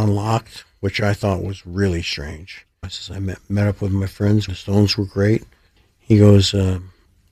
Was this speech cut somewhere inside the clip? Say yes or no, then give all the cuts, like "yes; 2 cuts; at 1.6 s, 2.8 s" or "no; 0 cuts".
yes; 2 cuts; at 2.8 s, 4.5 s